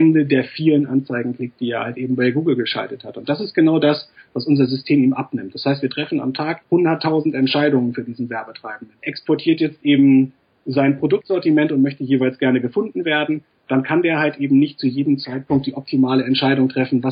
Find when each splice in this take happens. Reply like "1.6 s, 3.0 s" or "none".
6.6 s, 9.0 s

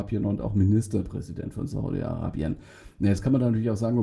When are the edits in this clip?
none

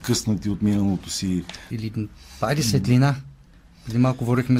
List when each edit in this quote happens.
1.7 s

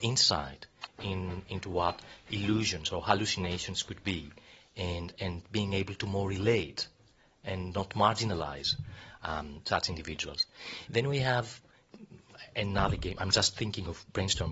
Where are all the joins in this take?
none

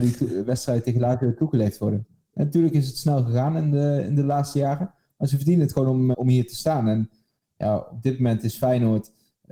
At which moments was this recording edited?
2.3 s, 6.1 s

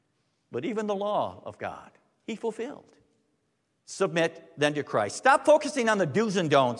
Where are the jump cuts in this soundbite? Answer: none

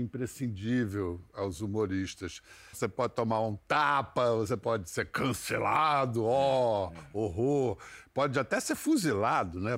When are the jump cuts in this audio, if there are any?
2.7 s

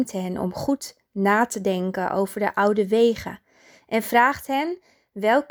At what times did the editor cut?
none

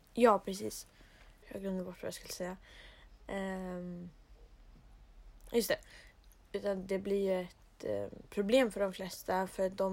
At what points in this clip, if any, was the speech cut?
1.4 s

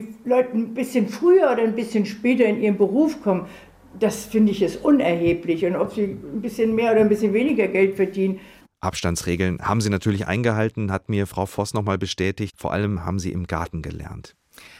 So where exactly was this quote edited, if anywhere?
none

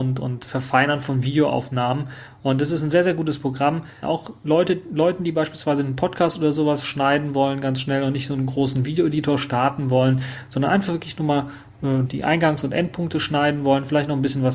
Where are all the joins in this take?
4.0 s, 12.1 s

